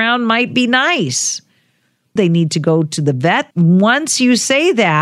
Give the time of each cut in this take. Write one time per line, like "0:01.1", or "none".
0:02.2
0:03.5